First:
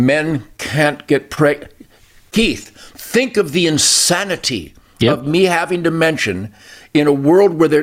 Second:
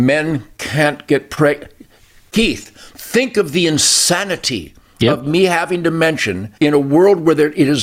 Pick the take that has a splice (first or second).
second